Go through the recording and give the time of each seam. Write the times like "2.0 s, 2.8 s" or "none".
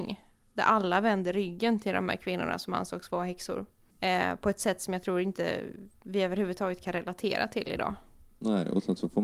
3.9 s